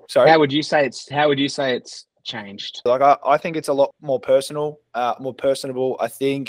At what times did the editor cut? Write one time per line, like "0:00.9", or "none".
0:02.9
0:03.9